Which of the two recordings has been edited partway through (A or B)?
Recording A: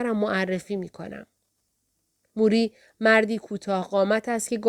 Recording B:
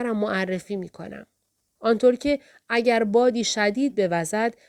B